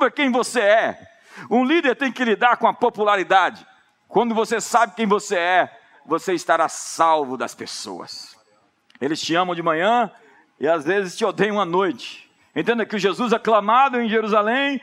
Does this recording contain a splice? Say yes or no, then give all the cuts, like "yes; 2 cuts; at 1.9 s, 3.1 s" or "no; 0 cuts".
no; 0 cuts